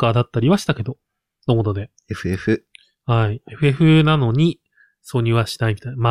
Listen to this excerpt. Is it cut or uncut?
uncut